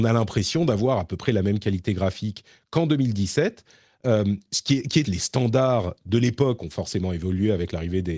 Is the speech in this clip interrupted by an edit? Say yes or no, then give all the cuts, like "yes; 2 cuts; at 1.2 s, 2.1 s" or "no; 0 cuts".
yes; 1 cut; at 5.0 s